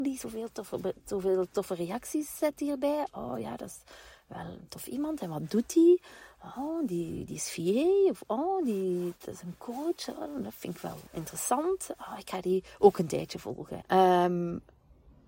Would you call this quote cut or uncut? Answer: cut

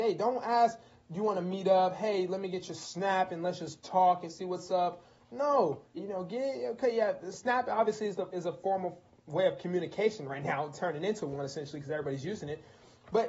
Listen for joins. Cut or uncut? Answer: cut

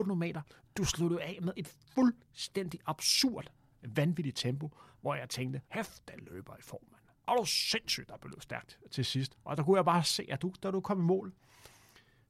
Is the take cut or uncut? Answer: cut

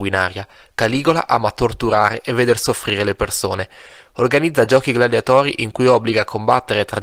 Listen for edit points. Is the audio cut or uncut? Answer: uncut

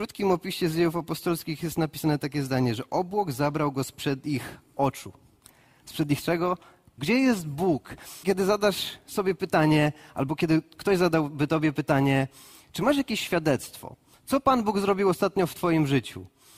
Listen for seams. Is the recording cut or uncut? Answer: cut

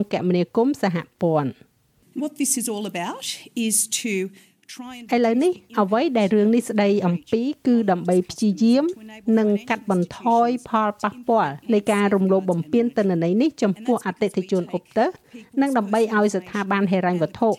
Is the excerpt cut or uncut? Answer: cut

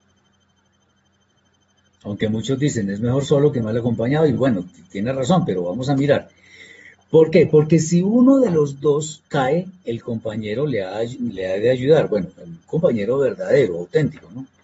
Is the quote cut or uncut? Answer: uncut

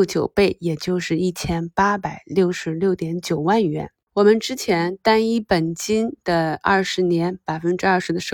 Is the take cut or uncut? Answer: cut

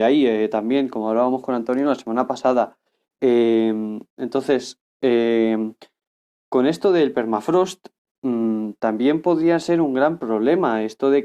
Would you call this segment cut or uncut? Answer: uncut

